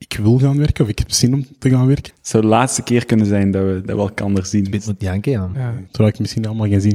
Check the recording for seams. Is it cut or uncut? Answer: cut